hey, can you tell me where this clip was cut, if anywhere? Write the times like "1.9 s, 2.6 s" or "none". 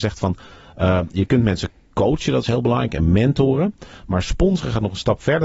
none